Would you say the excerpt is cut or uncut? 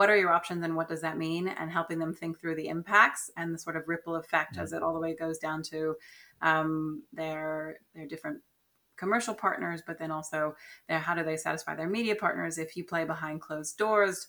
uncut